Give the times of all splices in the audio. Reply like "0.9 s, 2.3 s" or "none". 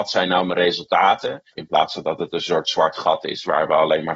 1.5 s